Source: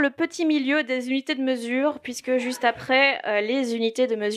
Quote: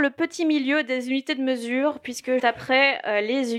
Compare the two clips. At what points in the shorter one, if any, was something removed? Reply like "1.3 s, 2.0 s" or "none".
2.4 s